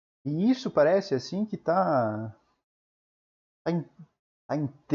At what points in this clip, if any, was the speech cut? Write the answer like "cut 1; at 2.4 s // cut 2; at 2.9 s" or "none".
none